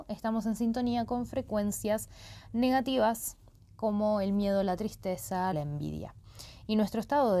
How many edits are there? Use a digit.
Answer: 1